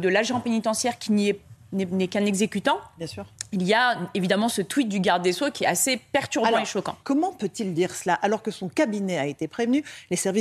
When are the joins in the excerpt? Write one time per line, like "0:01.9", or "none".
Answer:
0:07.0